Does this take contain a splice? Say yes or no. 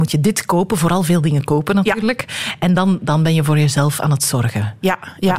no